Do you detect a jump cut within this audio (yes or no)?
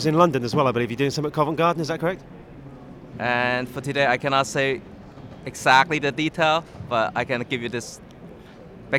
yes